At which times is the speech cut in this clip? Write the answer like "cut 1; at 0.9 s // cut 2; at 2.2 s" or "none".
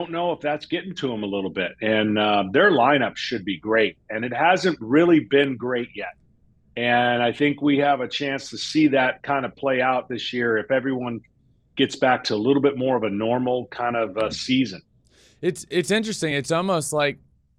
none